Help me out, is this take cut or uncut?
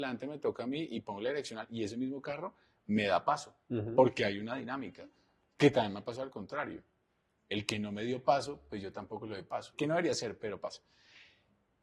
cut